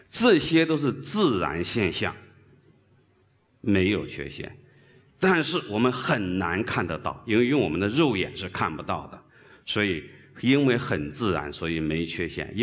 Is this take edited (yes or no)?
no